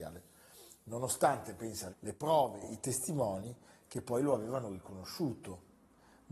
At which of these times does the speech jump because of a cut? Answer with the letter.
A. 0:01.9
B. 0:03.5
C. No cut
A